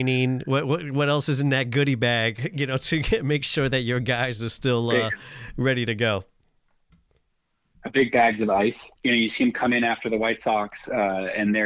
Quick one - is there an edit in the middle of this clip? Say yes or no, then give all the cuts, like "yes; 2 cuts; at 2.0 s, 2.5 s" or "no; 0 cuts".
yes; 1 cut; at 9.0 s